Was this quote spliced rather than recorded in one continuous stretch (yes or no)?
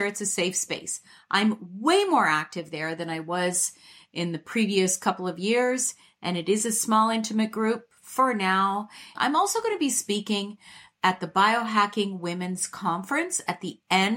yes